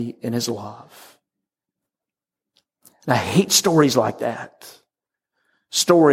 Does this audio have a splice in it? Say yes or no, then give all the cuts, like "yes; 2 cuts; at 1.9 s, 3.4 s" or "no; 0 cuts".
no; 0 cuts